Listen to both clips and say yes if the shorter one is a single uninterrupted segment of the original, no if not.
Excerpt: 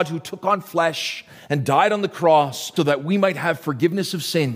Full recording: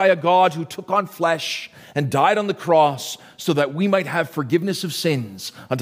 no